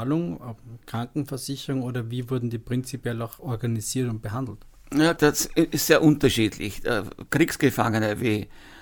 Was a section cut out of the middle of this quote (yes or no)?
yes